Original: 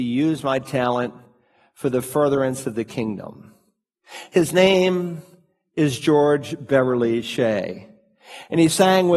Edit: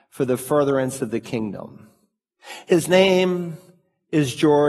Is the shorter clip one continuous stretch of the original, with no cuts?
yes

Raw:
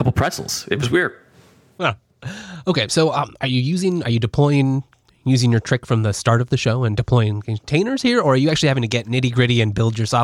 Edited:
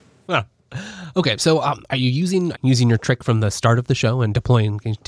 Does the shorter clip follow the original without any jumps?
no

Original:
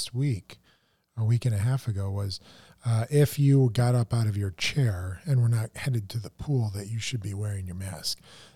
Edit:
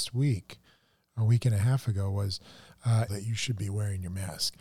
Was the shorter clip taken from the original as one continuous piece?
no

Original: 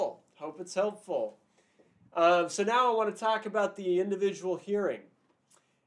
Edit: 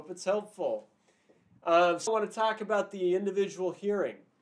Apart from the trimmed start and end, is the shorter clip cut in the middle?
yes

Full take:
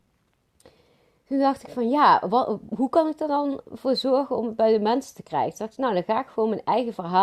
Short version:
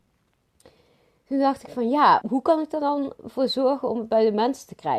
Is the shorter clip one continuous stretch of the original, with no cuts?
no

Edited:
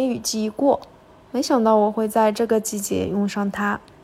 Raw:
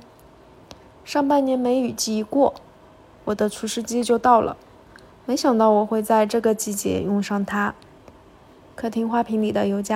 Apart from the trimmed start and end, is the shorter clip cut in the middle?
yes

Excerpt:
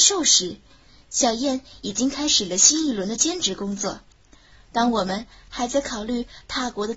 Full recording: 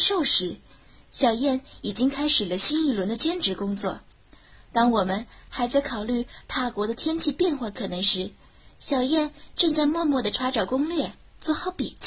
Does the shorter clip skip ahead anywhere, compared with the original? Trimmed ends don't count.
no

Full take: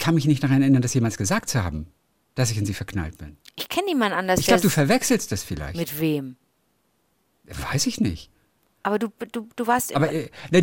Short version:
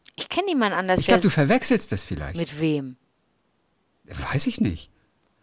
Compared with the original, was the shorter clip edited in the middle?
no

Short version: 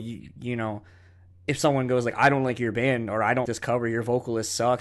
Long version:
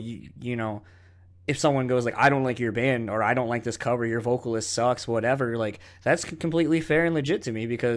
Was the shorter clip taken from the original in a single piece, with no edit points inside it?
no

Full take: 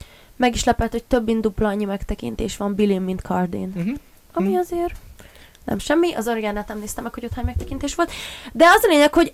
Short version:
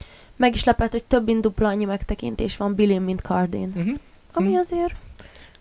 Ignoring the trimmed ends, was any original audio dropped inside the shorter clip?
no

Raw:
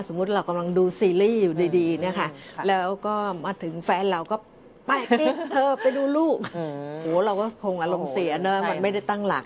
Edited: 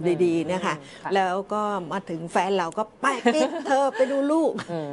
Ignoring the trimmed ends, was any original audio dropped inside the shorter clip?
yes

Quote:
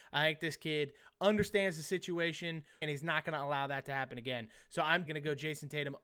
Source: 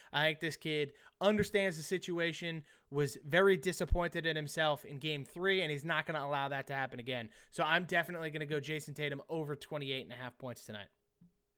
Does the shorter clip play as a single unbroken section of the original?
no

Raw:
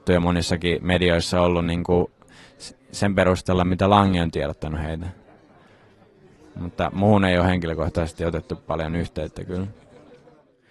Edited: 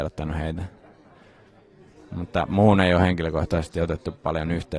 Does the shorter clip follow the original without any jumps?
yes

